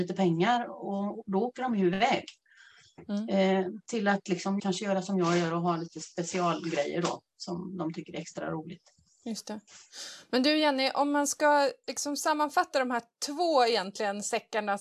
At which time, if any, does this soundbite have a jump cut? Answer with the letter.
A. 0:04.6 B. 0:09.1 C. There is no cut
A